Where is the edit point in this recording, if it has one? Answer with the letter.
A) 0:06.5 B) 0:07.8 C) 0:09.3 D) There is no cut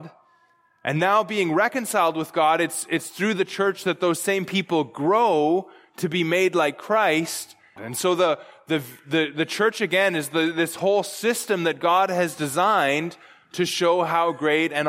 B